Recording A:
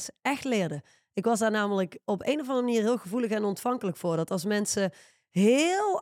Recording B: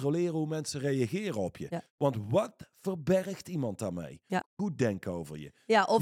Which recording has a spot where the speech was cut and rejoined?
B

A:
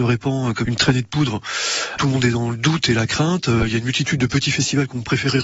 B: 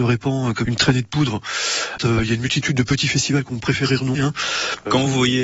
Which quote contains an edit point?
B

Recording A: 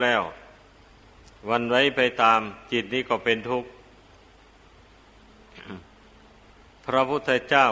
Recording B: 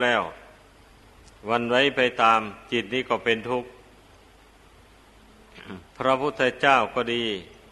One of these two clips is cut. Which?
B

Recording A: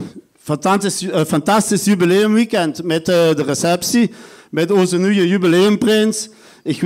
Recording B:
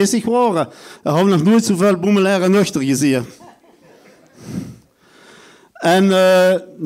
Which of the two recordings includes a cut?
B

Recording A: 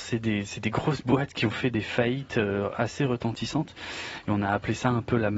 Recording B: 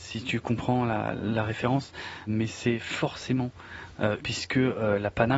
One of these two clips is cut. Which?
B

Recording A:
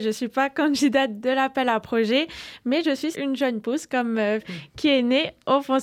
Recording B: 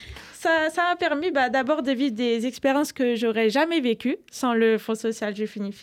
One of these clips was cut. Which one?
A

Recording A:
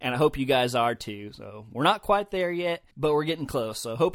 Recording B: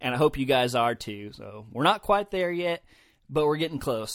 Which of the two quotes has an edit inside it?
A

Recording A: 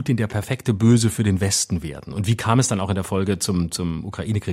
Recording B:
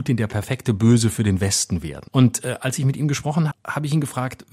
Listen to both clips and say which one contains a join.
B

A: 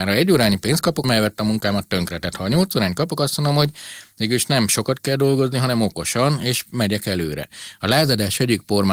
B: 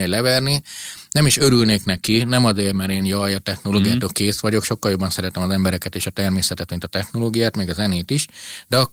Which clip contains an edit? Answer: A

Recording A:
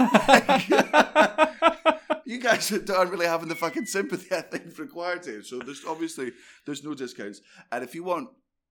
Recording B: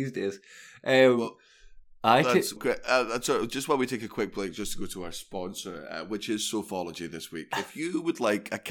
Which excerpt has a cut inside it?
B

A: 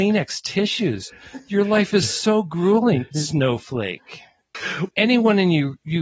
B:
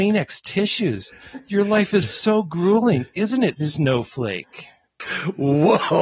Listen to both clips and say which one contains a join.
A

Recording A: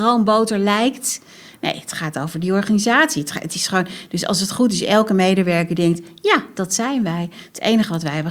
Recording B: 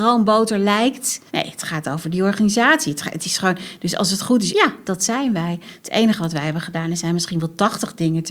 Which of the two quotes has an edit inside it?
B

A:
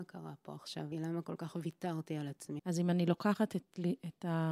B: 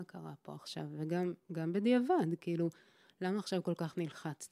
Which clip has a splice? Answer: A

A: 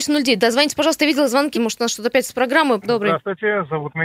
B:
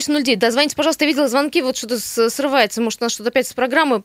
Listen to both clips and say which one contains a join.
A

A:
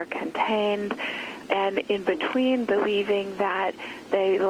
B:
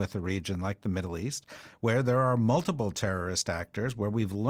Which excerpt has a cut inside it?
A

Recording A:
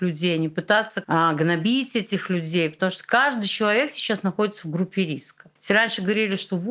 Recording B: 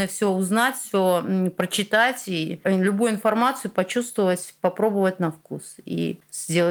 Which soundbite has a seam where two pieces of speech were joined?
A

